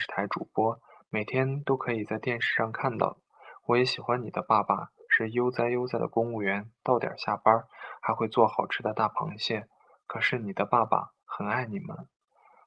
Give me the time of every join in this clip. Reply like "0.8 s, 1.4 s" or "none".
none